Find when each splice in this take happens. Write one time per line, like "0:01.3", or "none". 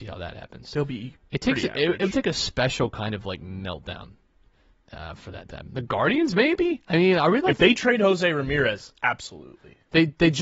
none